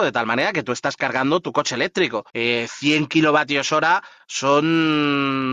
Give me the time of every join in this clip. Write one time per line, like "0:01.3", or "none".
0:02.3